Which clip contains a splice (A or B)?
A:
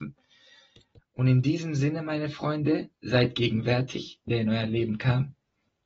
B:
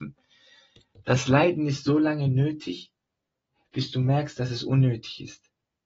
A